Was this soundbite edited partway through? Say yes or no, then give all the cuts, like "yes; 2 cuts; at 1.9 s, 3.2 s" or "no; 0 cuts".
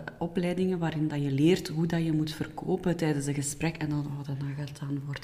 no; 0 cuts